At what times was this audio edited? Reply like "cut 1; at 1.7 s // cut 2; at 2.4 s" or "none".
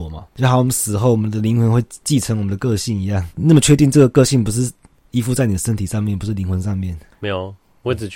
none